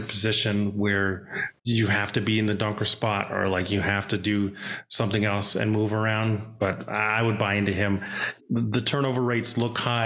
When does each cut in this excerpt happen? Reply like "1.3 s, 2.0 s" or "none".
1.6 s, 8.4 s